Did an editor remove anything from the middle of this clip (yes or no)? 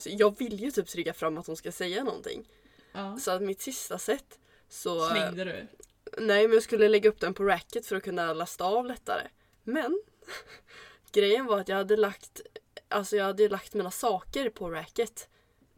yes